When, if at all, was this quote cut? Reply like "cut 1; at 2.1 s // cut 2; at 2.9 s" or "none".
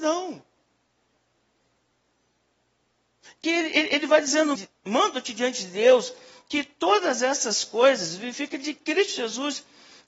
cut 1; at 3.4 s // cut 2; at 4.5 s